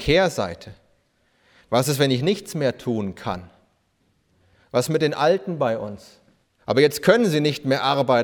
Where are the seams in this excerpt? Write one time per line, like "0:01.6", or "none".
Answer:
0:06.6